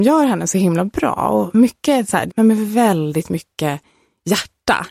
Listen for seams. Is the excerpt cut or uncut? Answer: cut